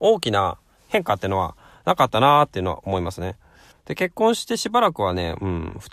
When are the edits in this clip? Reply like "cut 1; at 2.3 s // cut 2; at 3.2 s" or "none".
cut 1; at 3.7 s